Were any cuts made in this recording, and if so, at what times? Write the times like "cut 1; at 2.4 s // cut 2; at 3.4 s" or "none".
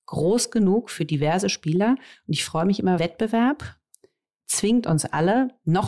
cut 1; at 3.0 s